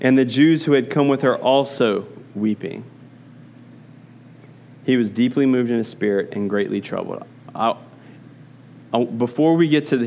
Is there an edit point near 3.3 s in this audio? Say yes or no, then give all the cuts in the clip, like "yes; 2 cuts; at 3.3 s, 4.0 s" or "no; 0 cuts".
no; 0 cuts